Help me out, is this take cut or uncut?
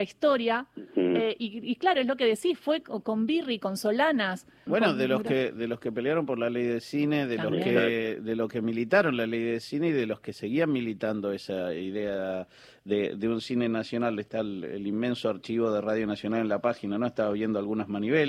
uncut